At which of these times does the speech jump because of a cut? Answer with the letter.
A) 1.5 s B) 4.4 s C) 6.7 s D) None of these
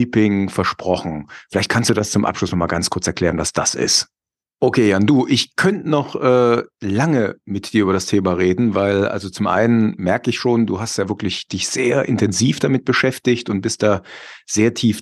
B